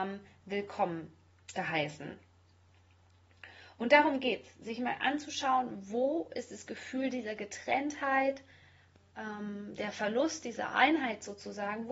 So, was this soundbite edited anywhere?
no; 0 cuts

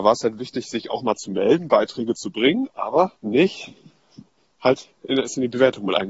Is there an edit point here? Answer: yes; 1 cut; at 3.2 s

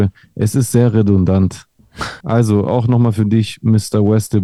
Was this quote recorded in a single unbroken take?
no; 1 cut; at 2.2 s

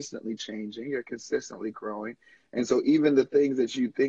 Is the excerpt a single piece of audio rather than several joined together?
yes; 0 cuts

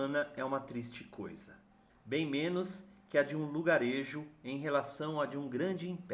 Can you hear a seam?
yes; 1 cut; at 1.9 s

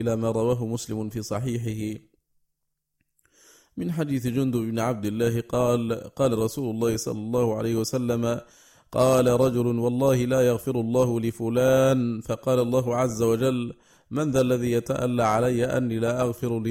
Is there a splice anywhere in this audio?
no; 0 cuts

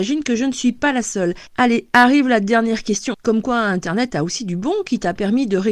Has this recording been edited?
yes; 2 cuts; at 1.5 s, 3.1 s

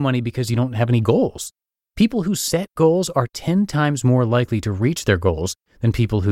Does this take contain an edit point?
no; 0 cuts

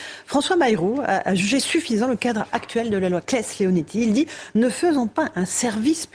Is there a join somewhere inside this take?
no; 0 cuts

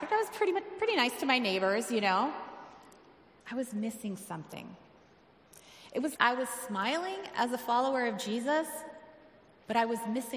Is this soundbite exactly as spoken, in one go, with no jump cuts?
no; 2 cuts; at 3.4 s, 6.2 s

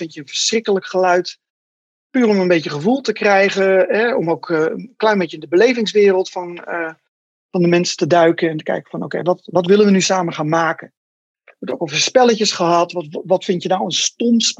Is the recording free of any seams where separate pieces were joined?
yes; 0 cuts

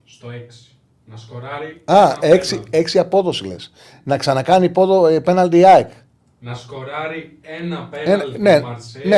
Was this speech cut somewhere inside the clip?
no; 0 cuts

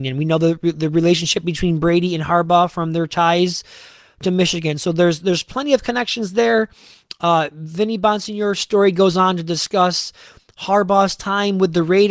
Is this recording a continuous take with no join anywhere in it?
yes; 0 cuts

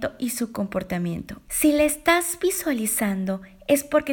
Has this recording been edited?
yes; 1 cut; at 1.5 s

